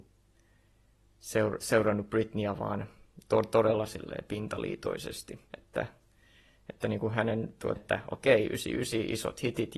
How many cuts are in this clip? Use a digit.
2